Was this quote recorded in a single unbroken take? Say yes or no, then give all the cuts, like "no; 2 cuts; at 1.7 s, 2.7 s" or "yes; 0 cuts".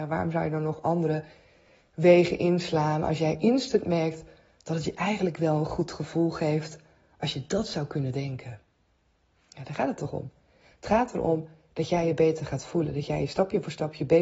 yes; 0 cuts